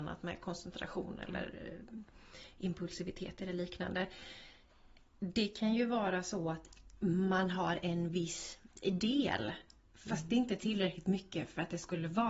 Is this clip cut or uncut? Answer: uncut